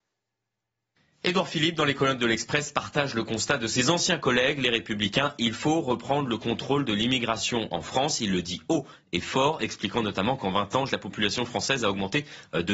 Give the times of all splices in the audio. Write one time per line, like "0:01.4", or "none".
0:10.9